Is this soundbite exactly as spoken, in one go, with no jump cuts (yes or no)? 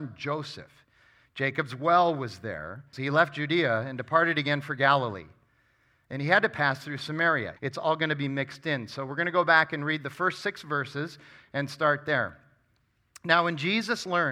no